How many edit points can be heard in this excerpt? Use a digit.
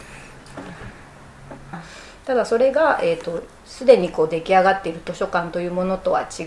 1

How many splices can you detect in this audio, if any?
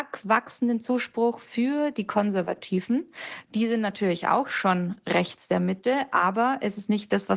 0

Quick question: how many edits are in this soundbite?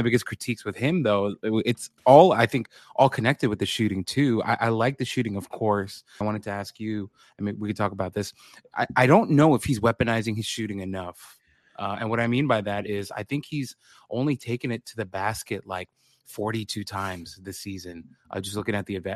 2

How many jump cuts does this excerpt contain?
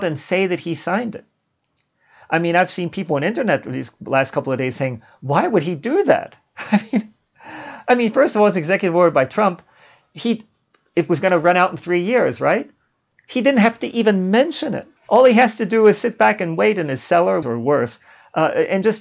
2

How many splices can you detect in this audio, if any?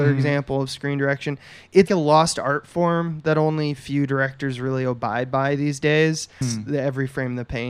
2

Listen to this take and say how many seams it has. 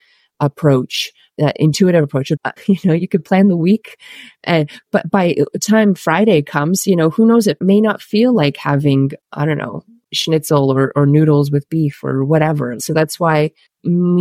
2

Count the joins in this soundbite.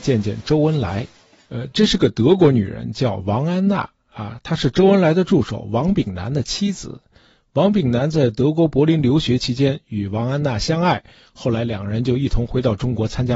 0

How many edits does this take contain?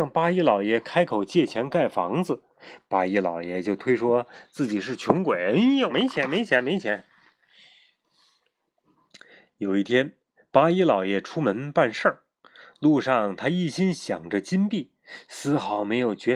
1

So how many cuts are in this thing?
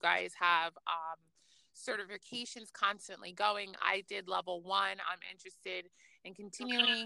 0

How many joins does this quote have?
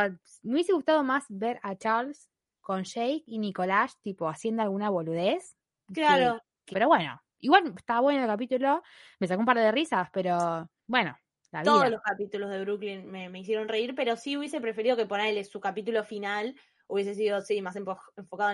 1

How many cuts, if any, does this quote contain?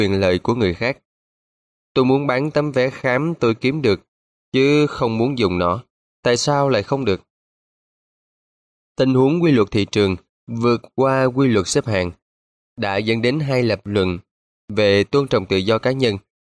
1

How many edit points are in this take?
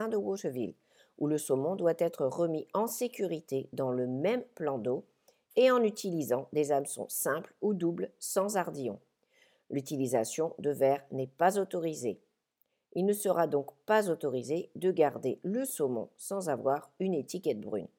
0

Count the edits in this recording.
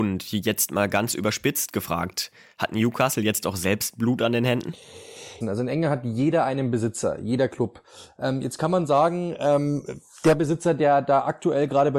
1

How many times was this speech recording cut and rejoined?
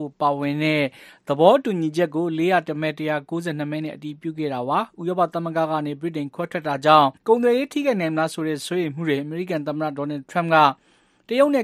1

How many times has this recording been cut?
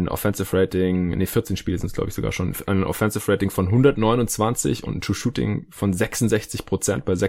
1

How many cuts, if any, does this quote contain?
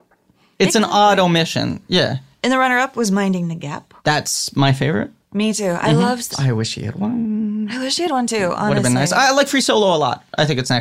2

